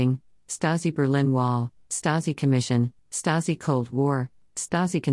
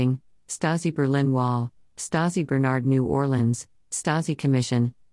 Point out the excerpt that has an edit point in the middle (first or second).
first